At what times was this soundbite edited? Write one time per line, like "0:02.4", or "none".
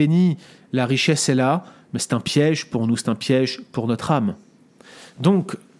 none